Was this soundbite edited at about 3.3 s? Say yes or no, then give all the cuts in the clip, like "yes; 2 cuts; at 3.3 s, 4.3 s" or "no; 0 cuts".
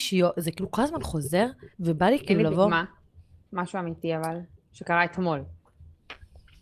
no; 1 cut; at 1.7 s